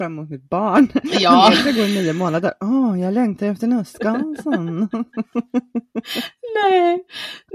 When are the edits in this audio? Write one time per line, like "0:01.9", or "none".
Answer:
none